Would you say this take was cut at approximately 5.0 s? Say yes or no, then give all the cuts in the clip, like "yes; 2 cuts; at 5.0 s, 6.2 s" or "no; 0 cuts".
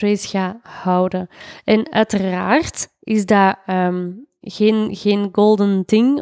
no; 0 cuts